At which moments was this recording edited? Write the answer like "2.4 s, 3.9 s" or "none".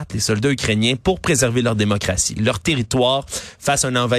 2.4 s